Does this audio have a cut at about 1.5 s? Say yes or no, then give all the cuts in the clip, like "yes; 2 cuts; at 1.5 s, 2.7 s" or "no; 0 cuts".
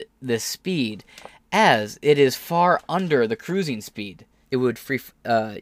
no; 1 cut; at 4.4 s